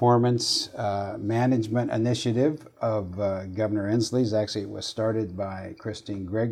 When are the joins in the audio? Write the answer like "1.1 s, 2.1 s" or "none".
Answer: none